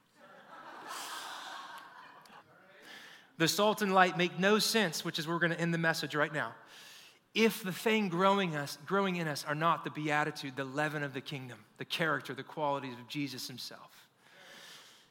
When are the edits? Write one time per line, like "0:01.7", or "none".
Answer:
0:02.4